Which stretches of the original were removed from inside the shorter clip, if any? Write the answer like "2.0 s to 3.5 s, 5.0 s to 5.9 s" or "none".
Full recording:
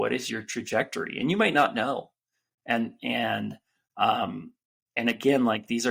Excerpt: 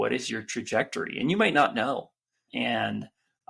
2.5 s to 3.0 s